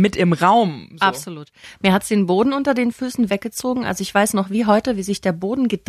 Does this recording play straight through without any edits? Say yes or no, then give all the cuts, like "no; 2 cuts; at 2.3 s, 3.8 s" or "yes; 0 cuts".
no; 1 cut; at 3.3 s